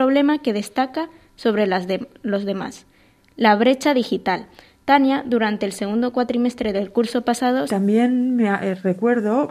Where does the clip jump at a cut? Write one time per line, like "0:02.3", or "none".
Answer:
0:07.7

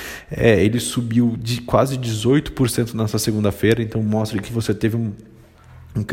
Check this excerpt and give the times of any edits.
0:04.5

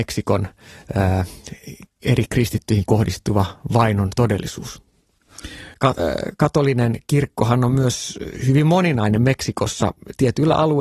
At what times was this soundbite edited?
0:05.7

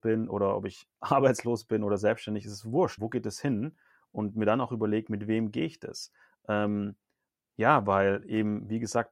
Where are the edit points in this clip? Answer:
0:03.0

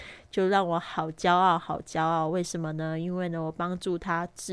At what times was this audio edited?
none

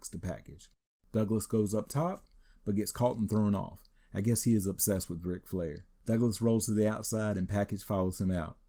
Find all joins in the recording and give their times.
none

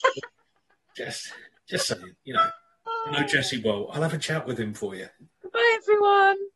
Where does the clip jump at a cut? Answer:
0:02.9
0:05.3

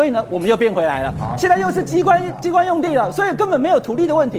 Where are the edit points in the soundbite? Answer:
none

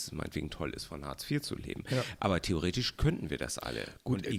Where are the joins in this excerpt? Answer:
none

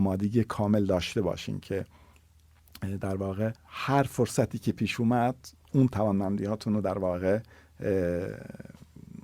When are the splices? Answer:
0:03.6
0:05.6

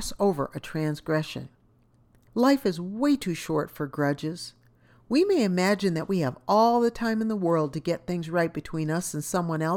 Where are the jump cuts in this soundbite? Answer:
none

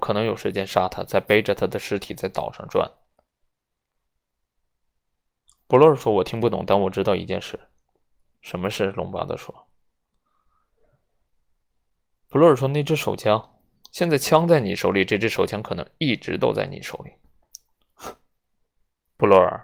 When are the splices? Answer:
0:13.8

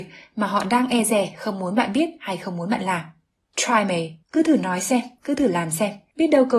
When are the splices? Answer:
0:04.2

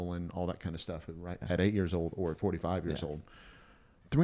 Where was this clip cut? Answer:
0:01.4

